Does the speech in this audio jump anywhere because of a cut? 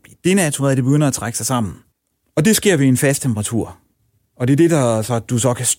no; 0 cuts

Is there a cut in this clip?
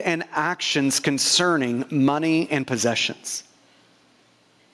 no; 0 cuts

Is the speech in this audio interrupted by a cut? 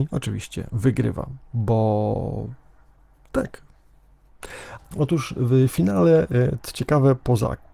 yes; 1 cut; at 4.8 s

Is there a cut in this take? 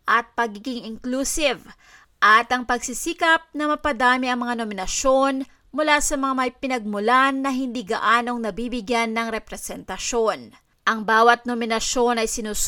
no; 0 cuts

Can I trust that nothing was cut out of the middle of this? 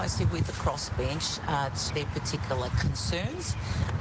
no; 1 cut; at 1.9 s

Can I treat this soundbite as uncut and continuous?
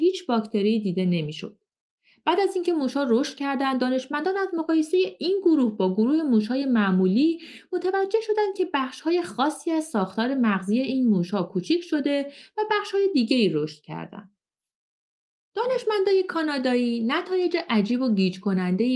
yes; 0 cuts

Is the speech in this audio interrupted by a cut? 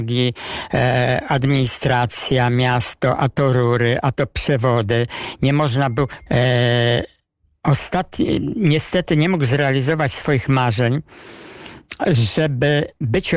yes; 1 cut; at 6.3 s

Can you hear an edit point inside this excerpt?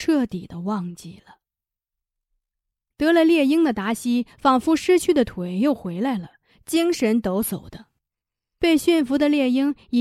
yes; 1 cut; at 2.9 s

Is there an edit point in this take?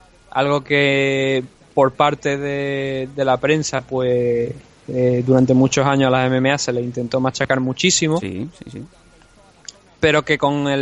no; 0 cuts

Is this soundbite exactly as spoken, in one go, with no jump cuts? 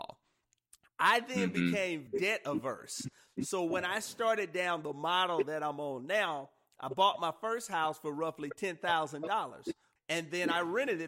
no; 3 cuts; at 2.1 s, 3.3 s, 10.0 s

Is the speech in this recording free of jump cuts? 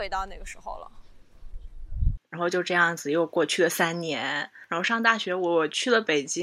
no; 1 cut; at 2.2 s

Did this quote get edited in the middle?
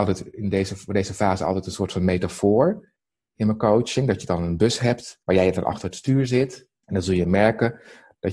yes; 2 cuts; at 5.2 s, 6.8 s

